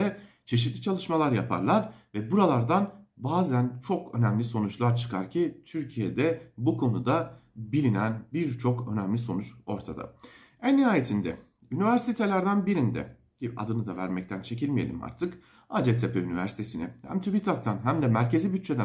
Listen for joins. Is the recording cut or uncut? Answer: uncut